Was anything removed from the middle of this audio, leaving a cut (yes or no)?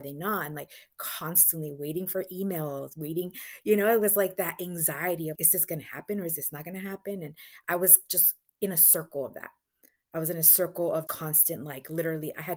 yes